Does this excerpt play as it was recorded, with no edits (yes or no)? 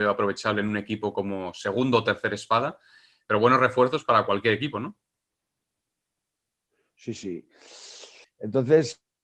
no